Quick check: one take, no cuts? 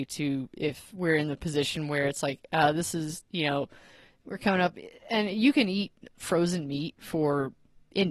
yes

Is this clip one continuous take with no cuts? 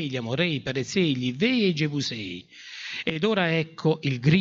yes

